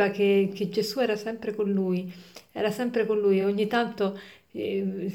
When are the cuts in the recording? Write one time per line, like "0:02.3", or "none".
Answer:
none